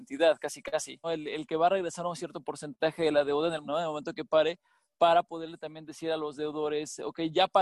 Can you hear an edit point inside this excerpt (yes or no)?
yes